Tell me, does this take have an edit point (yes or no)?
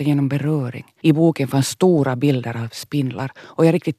yes